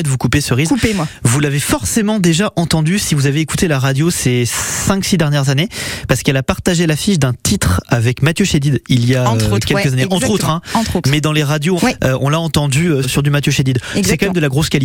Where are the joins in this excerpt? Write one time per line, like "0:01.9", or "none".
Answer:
0:11.8
0:13.0